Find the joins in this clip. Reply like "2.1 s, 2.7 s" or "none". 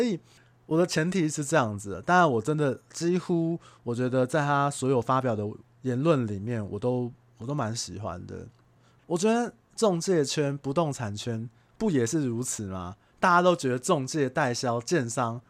9.0 s